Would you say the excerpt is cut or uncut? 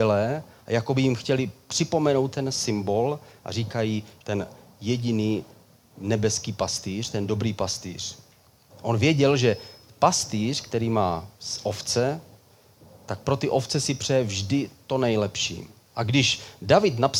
cut